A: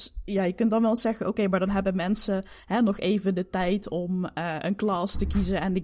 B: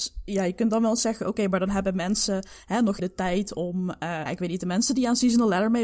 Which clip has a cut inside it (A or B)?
B